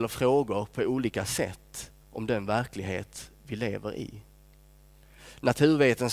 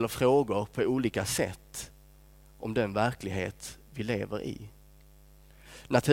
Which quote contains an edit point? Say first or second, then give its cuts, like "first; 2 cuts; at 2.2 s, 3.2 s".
first; 1 cut; at 2.0 s